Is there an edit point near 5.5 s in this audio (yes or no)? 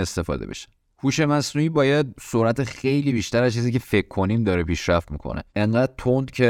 yes